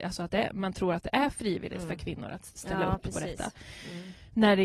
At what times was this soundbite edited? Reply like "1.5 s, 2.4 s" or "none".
2.6 s